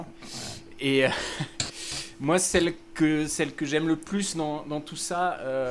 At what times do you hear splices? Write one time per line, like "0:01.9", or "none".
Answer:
none

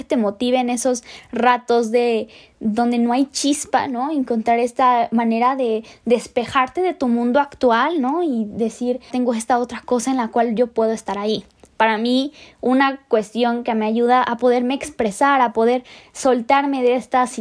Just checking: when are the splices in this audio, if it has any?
0:09.1

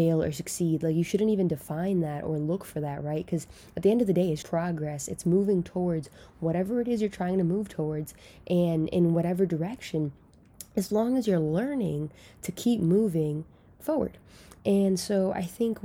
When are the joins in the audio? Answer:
0:04.4

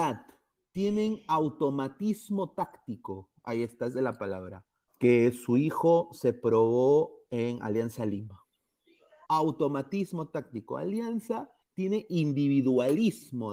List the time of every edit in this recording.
0:04.9
0:09.2
0:11.6

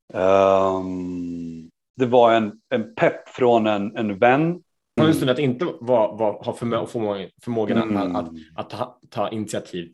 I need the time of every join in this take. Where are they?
0:01.9
0:05.0

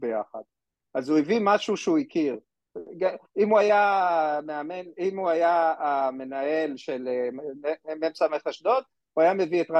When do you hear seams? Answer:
none

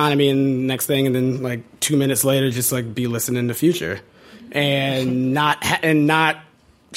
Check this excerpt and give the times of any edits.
none

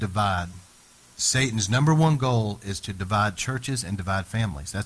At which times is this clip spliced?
0:01.1

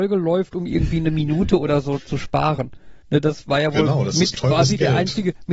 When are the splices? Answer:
0:03.0

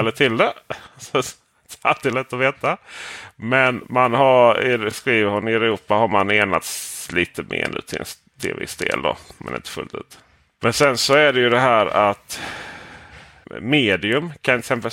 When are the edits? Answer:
none

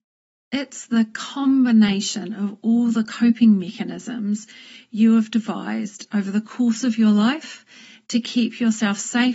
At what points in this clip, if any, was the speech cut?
none

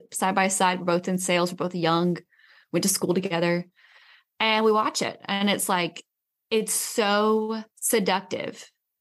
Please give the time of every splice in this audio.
0:07.7

